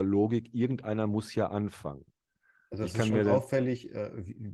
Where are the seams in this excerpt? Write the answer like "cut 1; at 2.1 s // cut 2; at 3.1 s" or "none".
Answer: none